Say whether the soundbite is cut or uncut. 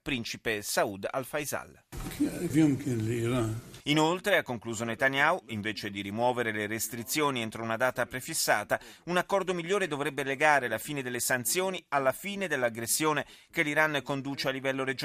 cut